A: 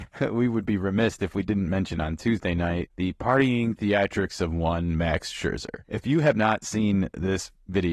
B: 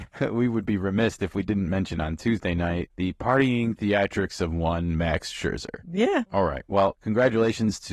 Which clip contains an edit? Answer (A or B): B